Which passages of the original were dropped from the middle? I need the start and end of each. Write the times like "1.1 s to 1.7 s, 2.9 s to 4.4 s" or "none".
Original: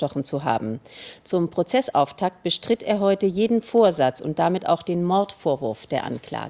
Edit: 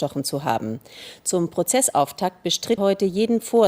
2.8 s to 3.0 s